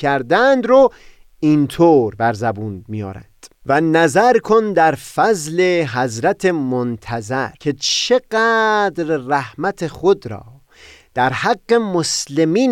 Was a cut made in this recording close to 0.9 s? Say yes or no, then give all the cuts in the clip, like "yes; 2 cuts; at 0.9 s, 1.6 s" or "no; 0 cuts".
no; 2 cuts; at 3.6 s, 7.6 s